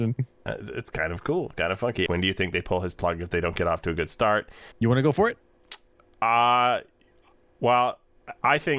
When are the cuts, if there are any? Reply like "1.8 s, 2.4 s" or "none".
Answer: 2.1 s, 4.7 s